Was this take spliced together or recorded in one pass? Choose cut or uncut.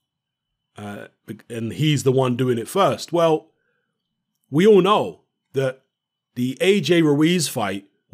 uncut